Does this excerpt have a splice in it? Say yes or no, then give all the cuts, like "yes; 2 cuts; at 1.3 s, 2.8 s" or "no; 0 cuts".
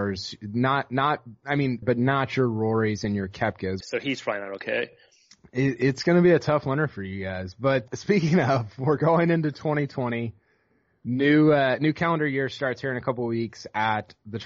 yes; 3 cuts; at 1.8 s, 3.8 s, 7.9 s